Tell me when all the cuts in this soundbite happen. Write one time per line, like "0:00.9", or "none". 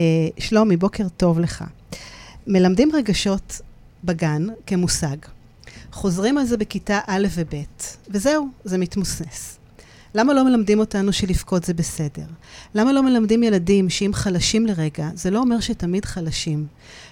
none

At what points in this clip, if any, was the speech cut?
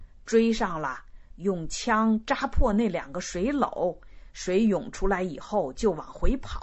none

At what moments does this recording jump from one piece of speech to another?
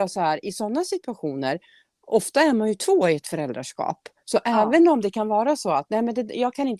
none

